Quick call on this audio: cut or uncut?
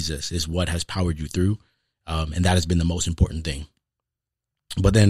uncut